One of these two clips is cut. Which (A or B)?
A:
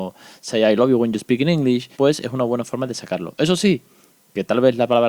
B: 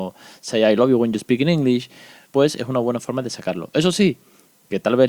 A